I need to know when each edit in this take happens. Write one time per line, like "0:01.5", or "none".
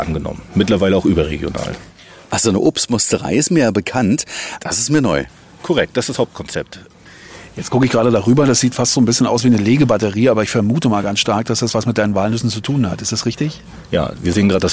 0:04.6